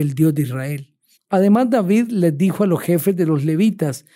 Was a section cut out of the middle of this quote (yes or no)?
yes